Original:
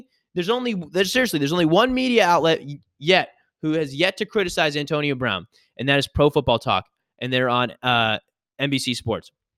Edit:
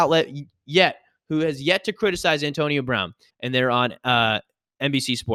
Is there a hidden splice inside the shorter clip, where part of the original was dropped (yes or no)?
yes